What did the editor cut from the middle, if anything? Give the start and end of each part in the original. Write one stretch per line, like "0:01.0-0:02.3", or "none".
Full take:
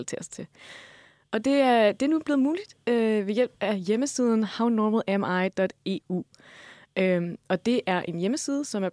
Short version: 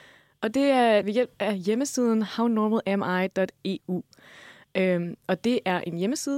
0:01.9-0:03.2